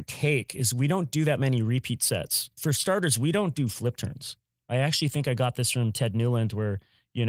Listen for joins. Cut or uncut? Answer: uncut